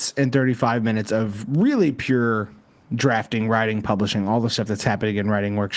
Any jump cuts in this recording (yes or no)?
no